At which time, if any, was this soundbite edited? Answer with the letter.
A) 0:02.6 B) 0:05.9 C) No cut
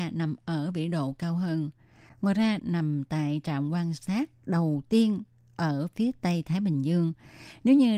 A